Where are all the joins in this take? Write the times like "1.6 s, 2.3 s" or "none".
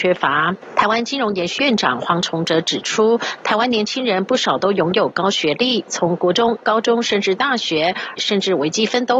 1.6 s, 8.2 s

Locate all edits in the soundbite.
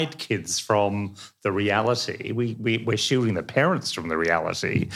none

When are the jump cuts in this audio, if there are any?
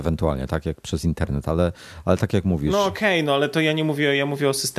none

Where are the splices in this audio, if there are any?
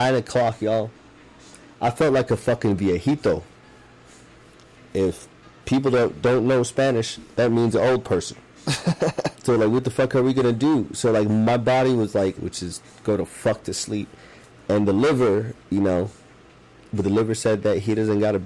9.3 s, 12.4 s, 14.6 s

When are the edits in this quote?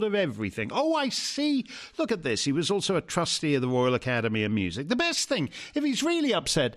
none

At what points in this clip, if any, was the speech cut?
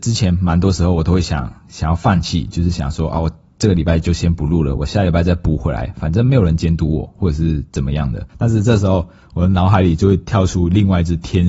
8.3 s

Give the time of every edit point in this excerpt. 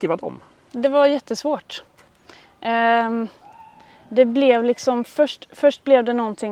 none

